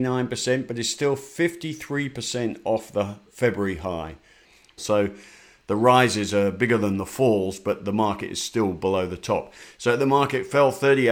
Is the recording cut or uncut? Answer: cut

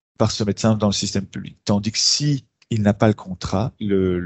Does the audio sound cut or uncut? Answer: uncut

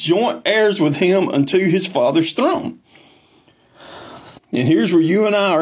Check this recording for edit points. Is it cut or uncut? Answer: cut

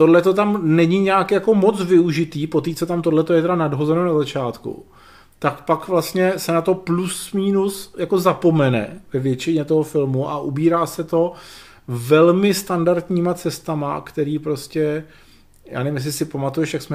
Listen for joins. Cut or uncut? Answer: uncut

